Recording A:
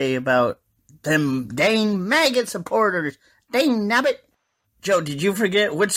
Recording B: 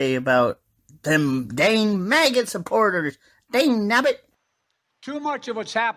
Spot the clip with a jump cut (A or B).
A